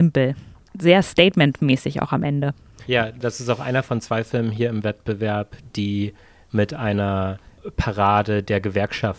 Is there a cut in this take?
no; 0 cuts

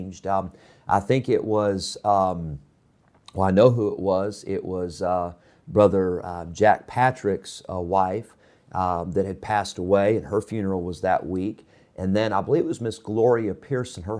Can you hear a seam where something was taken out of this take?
no; 0 cuts

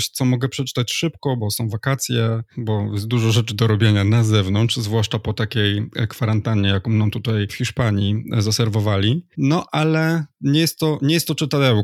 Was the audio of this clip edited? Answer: yes; 1 cut; at 1.4 s

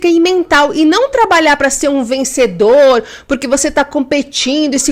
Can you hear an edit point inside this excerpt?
no; 0 cuts

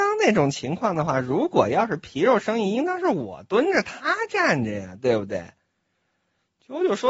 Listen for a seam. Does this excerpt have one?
no; 0 cuts

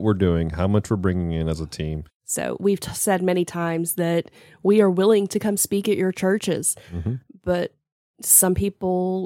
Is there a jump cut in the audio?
yes; 1 cut; at 2.1 s

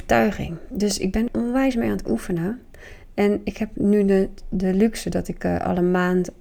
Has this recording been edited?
yes; 1 cut; at 1.3 s

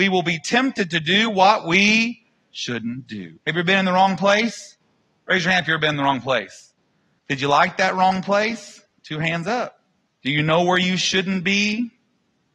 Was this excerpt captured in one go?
no; 3 cuts; at 3.4 s, 7.2 s, 10.1 s

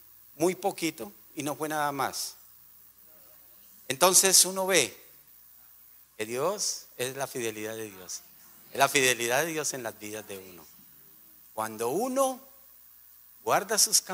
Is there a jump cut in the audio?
no; 0 cuts

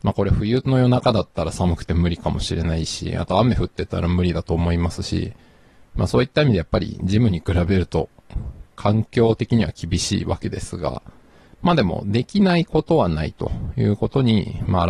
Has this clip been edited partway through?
no; 0 cuts

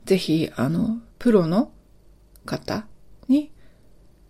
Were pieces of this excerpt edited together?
yes; 1 cut; at 1.1 s

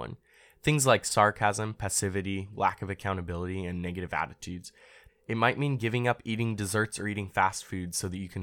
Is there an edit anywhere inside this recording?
yes; 2 cuts; at 2.5 s, 5.1 s

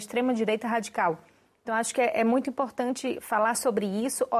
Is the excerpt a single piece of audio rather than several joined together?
yes; 0 cuts

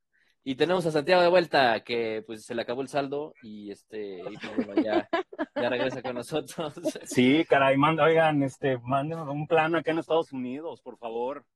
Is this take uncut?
yes; 0 cuts

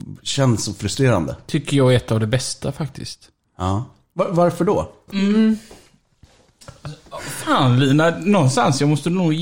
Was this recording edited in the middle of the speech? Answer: yes; 1 cut; at 5.1 s

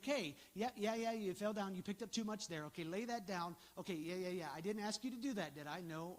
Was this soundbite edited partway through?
no; 0 cuts

